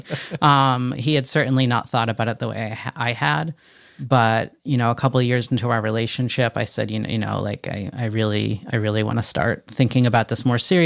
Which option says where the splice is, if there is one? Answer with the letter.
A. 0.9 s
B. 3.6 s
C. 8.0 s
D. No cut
D